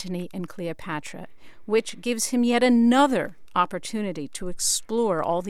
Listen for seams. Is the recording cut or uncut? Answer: uncut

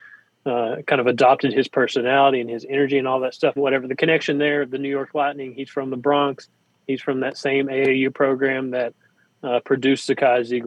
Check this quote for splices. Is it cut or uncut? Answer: cut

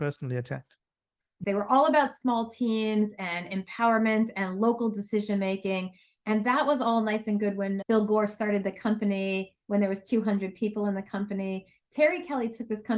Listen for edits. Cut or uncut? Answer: cut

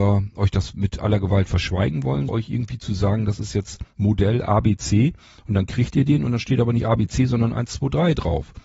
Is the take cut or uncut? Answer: cut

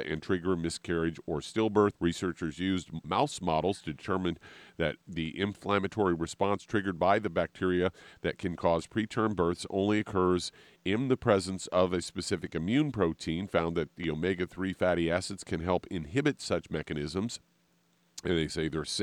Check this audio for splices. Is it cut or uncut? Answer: cut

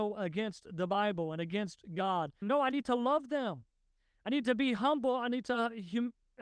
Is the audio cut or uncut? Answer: cut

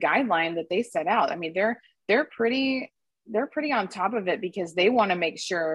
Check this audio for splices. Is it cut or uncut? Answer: uncut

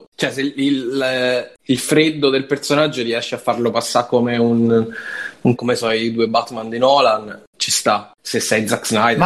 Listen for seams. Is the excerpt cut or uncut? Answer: cut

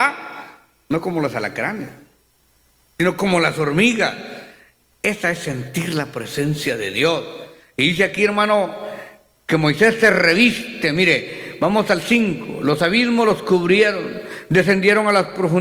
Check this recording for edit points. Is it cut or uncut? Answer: uncut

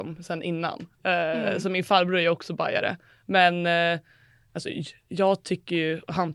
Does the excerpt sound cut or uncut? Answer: uncut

